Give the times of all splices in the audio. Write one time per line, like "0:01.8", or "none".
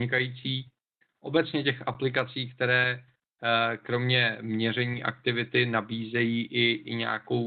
0:01.0